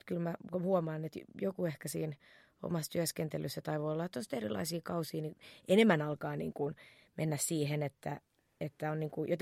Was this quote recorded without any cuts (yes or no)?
yes